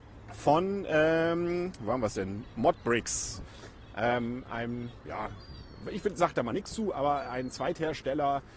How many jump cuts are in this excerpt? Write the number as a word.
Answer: zero